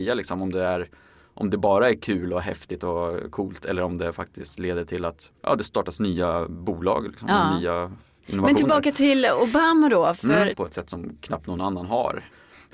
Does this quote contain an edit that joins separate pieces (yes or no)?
yes